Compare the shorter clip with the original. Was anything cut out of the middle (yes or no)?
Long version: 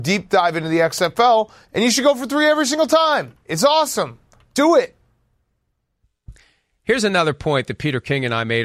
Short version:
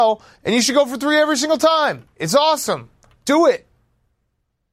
no